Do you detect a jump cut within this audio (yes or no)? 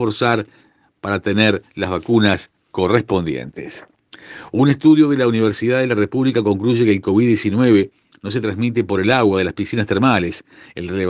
no